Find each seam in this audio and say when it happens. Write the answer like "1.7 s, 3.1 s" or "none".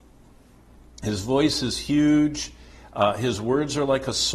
none